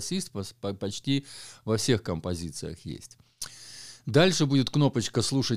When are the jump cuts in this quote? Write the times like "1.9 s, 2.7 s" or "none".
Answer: none